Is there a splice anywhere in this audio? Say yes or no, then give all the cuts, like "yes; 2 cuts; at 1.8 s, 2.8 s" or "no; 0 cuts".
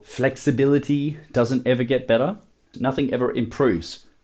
yes; 1 cut; at 2.7 s